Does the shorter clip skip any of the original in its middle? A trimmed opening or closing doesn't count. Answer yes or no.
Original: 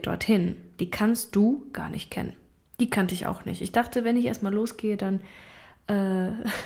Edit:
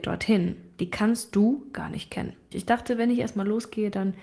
yes